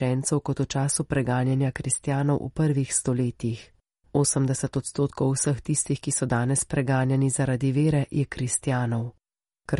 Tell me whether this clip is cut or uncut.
uncut